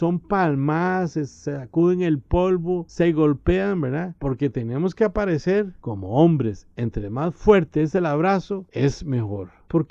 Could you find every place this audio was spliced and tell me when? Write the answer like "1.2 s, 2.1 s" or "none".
none